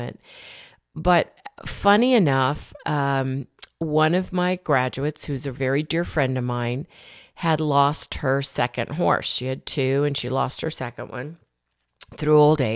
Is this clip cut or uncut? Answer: uncut